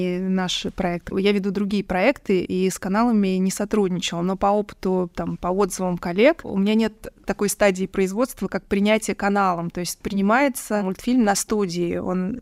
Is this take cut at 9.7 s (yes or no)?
no